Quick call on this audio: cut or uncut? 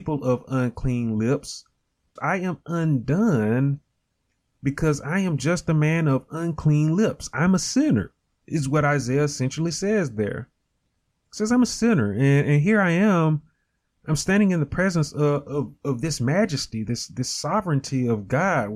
cut